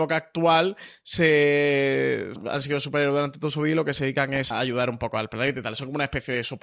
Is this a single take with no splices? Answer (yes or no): no